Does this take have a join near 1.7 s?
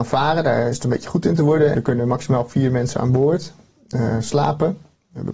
yes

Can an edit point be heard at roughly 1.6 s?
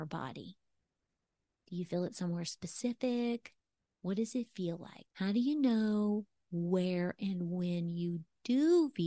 no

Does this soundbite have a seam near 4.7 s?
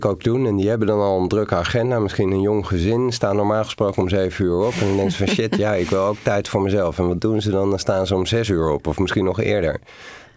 no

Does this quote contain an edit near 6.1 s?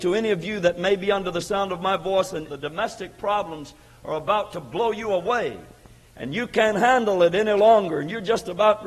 no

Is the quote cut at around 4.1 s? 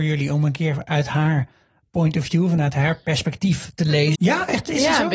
yes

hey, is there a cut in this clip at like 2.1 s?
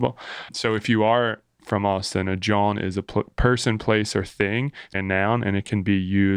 no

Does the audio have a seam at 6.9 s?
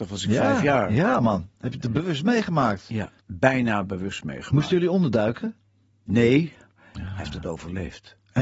yes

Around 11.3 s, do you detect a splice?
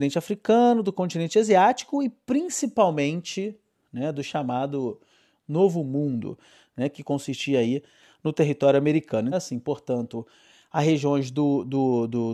no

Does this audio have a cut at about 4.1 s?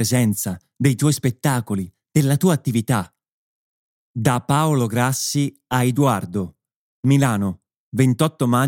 yes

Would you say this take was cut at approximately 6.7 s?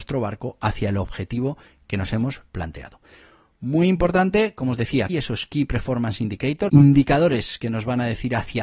yes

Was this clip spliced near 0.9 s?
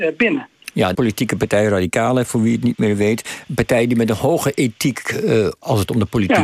yes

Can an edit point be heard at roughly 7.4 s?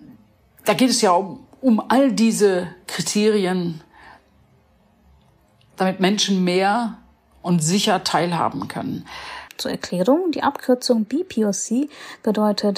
no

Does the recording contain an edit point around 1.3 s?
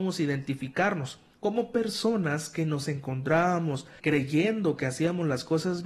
yes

